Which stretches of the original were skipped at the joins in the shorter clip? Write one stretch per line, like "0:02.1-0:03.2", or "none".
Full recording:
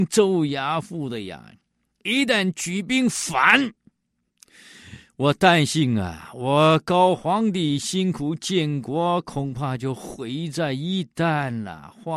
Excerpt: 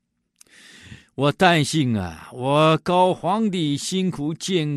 none